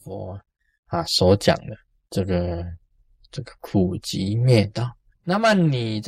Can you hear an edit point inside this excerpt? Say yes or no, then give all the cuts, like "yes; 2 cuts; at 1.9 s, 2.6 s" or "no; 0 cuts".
yes; 1 cut; at 5.1 s